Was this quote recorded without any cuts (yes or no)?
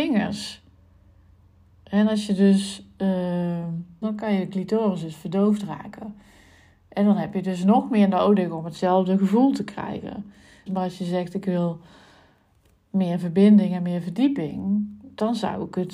no